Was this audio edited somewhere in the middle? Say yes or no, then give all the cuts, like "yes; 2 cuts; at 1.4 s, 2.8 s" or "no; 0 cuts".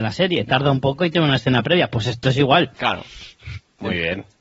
no; 0 cuts